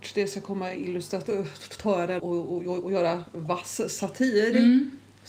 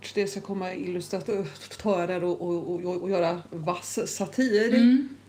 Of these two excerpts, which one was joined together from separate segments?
first; 1 cut; at 2.2 s

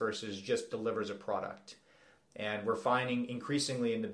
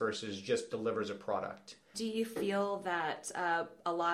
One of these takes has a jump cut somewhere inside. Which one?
second; 1 cut; at 1.9 s

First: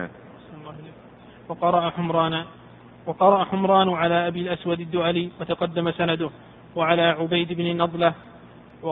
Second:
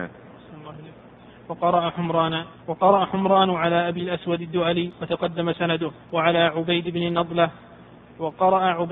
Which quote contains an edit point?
second; 2 cuts; at 2.6 s, 6.0 s

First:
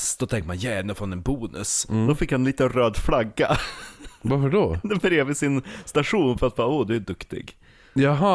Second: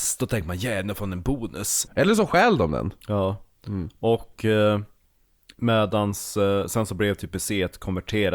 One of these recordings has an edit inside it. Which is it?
second; 1 cut; at 1.9 s

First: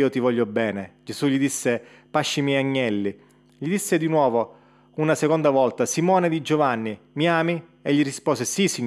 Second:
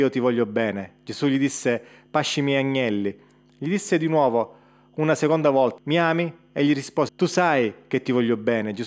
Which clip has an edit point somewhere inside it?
second; 2 cuts; at 5.8 s, 7.1 s

